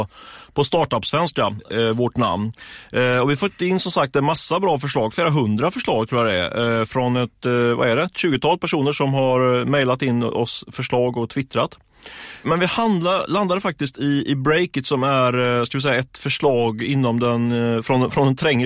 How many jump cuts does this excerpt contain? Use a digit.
0